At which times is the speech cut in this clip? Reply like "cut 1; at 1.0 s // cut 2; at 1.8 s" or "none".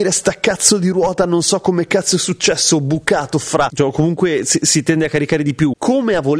cut 1; at 3.7 s